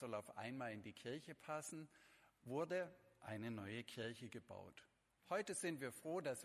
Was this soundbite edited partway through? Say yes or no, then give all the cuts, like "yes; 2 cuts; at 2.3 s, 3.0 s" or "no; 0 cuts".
no; 0 cuts